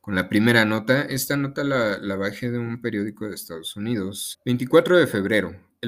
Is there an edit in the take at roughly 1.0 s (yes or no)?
no